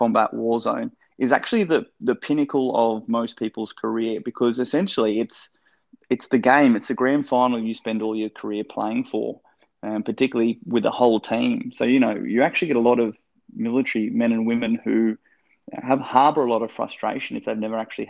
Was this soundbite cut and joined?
no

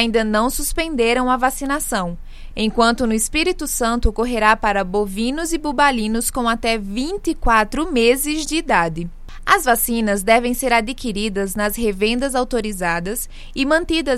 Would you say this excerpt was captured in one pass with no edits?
yes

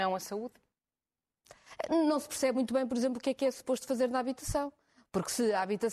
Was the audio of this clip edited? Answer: no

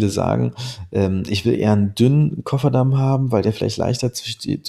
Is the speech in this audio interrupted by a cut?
no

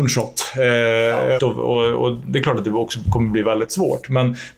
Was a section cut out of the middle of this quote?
yes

